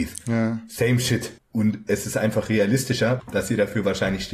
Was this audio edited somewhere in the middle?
yes; 2 cuts; at 1.4 s, 3.2 s

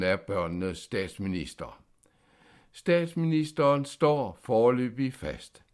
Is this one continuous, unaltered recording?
yes; 0 cuts

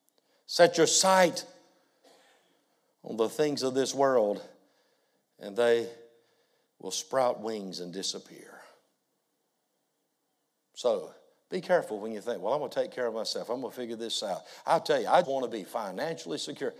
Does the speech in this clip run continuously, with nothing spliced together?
no; 1 cut; at 15.2 s

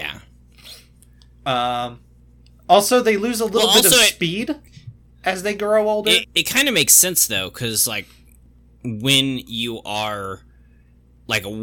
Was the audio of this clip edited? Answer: yes; 1 cut; at 6.2 s

